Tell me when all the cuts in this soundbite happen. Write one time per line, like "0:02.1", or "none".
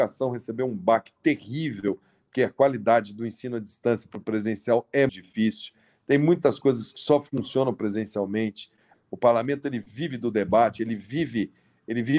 0:05.1
0:08.9